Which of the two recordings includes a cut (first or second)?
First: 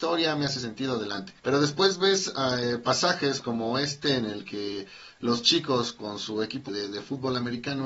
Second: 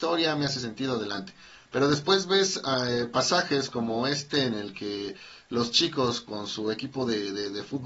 first